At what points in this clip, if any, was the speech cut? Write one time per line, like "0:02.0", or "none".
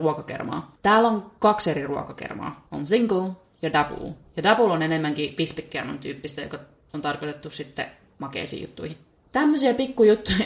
none